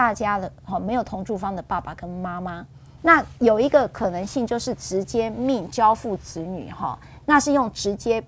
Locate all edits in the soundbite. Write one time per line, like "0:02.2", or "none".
0:03.0